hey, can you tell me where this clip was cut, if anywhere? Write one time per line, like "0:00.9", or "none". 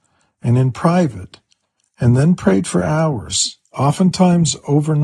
none